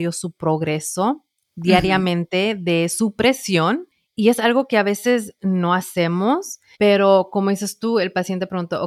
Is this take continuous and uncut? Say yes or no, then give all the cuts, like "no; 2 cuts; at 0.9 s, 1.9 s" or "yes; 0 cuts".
no; 1 cut; at 6.7 s